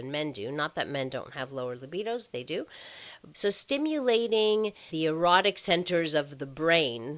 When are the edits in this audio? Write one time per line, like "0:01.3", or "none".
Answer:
0:03.3
0:04.9